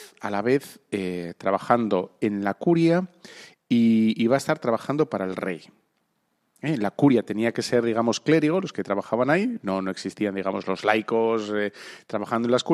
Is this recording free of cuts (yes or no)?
yes